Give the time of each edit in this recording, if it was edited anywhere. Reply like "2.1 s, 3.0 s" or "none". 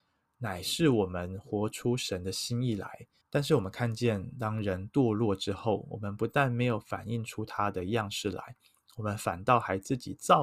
3.2 s